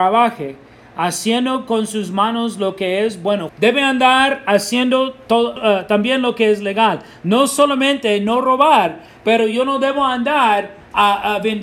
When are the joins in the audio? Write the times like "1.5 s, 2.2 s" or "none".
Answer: 3.5 s, 5.6 s

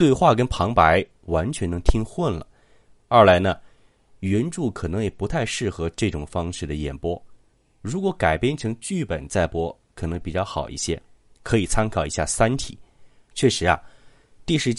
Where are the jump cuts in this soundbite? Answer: 13.3 s

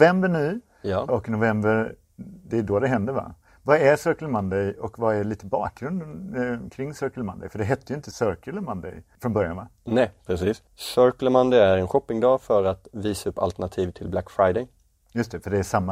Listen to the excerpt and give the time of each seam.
none

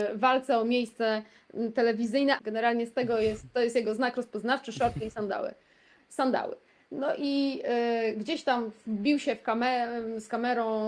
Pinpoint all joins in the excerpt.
2.4 s

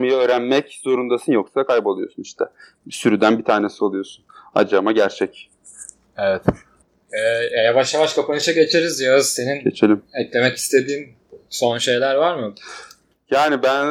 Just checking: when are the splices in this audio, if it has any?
none

